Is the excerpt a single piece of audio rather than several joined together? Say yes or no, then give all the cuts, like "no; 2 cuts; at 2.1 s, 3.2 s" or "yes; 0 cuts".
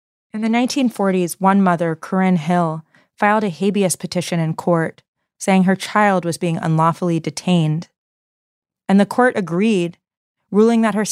yes; 0 cuts